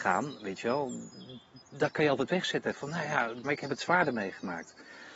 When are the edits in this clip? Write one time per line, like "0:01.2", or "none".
0:01.6
0:03.4